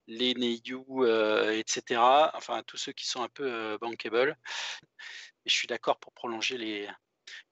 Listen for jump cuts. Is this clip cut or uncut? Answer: cut